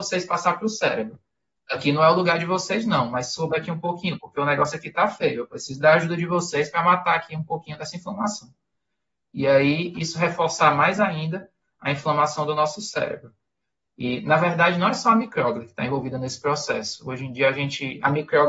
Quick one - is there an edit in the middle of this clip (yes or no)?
no